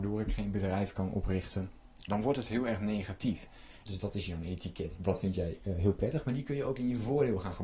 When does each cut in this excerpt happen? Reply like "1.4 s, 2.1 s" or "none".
2.1 s, 3.9 s